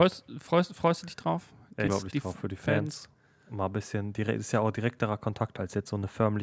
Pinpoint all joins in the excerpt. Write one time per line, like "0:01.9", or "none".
0:01.9

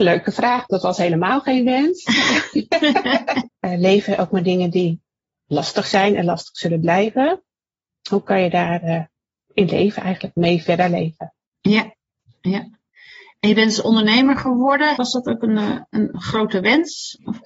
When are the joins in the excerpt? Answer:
0:03.5
0:15.0

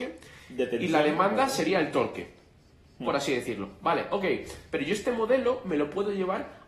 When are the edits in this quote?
none

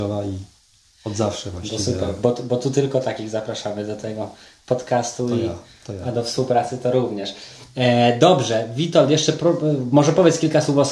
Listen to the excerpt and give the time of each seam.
none

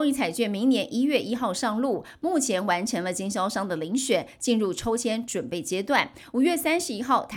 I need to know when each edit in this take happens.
none

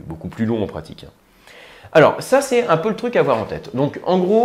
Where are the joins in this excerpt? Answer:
none

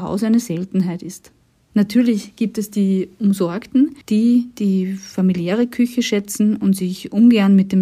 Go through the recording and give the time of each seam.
0:01.7
0:04.0

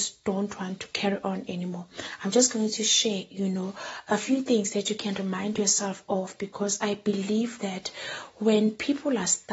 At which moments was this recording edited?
none

